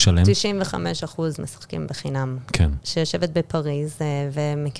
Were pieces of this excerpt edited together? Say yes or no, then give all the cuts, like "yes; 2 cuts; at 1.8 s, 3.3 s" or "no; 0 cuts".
yes; 1 cut; at 2.8 s